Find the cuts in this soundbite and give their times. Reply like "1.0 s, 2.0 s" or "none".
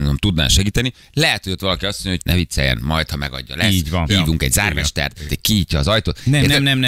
2.2 s, 5.3 s